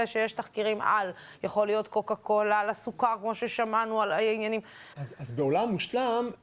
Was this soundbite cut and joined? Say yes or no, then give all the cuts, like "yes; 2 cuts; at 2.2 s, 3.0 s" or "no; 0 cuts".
yes; 1 cut; at 4.9 s